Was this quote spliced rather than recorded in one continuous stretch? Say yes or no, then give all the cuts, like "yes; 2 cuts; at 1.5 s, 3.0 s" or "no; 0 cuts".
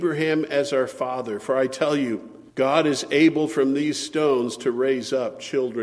yes; 1 cut; at 2.5 s